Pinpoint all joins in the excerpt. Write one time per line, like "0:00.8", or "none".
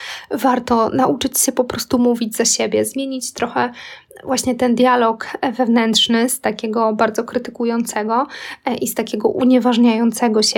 none